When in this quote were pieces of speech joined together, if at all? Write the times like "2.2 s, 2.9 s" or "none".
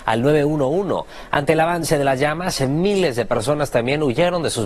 none